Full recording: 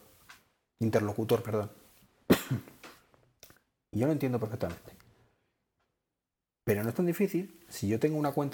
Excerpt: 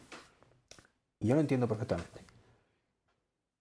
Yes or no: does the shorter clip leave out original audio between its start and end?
no